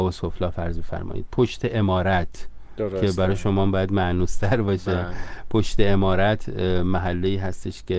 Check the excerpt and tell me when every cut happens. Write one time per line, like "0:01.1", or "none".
none